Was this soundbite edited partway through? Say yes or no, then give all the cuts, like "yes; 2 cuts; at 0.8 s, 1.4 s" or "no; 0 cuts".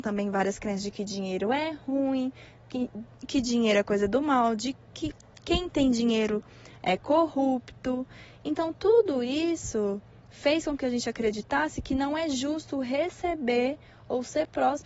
no; 0 cuts